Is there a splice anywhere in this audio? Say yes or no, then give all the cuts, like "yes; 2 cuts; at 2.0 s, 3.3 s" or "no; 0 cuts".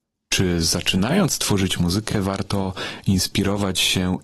no; 0 cuts